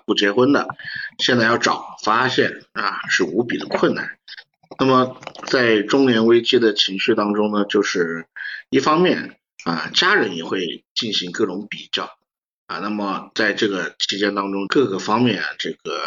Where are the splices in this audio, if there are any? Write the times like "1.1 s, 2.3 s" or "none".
14.7 s